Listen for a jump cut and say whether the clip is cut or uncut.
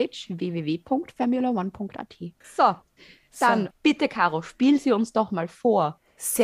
cut